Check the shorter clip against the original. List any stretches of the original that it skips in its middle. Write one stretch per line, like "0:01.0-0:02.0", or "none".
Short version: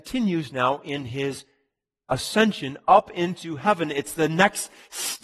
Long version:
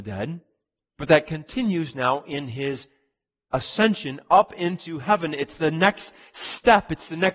none